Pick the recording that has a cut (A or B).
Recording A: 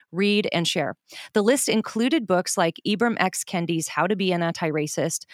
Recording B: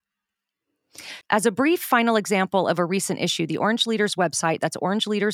B